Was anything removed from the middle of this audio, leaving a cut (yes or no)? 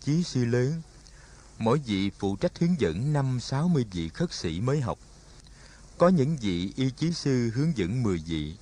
no